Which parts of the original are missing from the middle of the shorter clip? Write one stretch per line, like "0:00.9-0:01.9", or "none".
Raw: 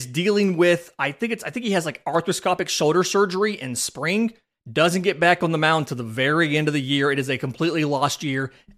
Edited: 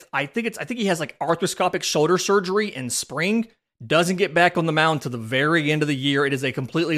none